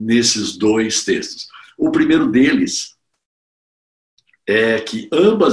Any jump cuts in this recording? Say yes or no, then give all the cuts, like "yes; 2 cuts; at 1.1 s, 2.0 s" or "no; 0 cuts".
no; 0 cuts